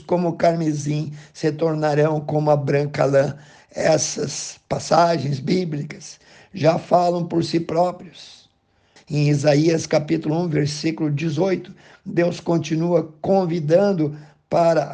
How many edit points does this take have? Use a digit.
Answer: 1